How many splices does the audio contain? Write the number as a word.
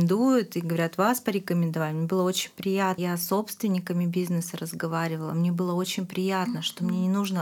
one